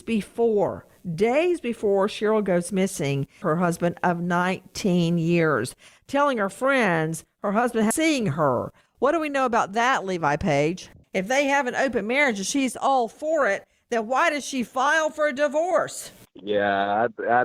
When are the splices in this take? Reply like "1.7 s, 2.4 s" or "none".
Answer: 3.4 s, 11.0 s